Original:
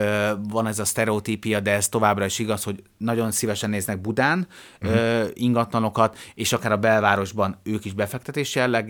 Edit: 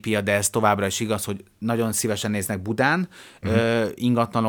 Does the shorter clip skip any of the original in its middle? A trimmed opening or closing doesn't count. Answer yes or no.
no